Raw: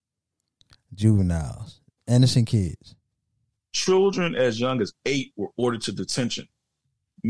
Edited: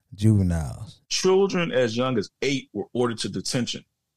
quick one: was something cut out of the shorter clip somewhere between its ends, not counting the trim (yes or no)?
yes